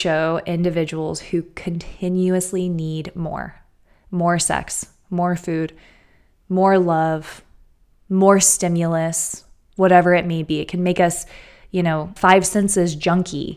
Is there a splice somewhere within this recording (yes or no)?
yes